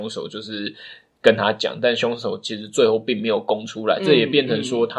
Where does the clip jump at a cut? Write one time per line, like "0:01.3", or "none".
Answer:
none